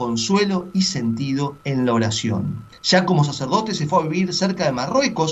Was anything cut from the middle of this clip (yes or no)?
yes